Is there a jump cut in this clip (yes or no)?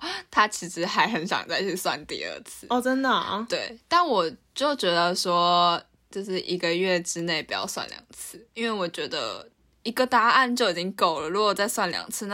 no